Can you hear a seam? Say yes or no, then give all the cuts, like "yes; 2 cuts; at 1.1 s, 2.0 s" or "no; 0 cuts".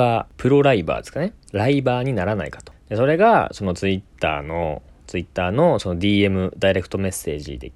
no; 0 cuts